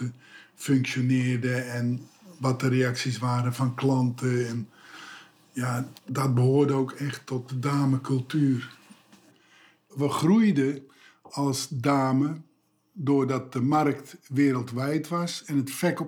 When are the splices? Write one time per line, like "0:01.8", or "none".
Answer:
0:06.0